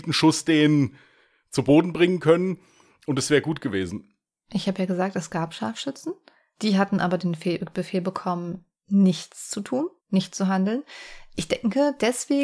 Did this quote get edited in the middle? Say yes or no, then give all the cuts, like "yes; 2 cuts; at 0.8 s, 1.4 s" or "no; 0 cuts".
yes; 1 cut; at 10.0 s